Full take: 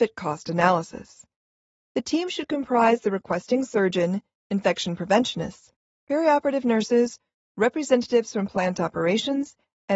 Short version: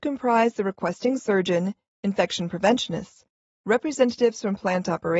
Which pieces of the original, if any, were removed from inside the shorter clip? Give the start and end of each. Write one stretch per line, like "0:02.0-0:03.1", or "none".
0:05.9-0:07.4